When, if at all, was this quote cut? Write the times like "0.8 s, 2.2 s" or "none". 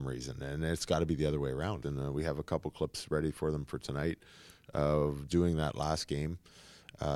1.8 s, 5.3 s